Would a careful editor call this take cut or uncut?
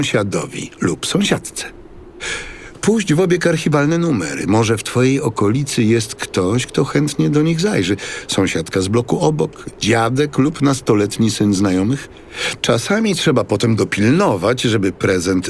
cut